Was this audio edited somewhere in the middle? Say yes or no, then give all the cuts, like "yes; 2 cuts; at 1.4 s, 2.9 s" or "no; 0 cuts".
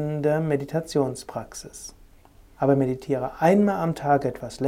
yes; 1 cut; at 2.5 s